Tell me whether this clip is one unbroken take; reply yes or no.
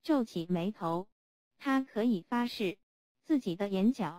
yes